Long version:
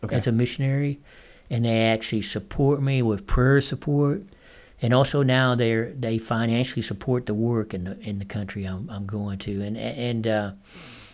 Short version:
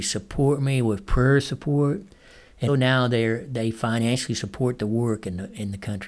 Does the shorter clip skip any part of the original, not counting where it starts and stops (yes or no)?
yes